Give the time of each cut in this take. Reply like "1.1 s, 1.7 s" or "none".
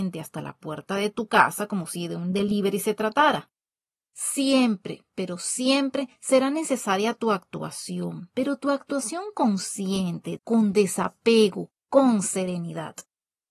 10.4 s, 11.8 s